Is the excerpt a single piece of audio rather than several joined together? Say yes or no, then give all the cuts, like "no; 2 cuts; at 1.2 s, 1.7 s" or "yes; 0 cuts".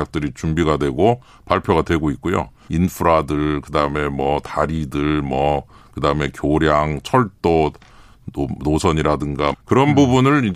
no; 2 cuts; at 2.7 s, 9.5 s